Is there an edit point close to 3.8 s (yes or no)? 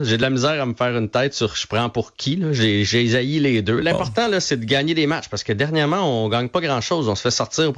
yes